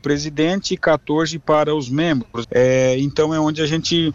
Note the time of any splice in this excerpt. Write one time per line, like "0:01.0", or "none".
0:02.4